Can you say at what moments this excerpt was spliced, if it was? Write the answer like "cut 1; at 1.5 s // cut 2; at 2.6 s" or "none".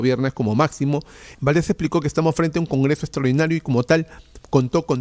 cut 1; at 1.3 s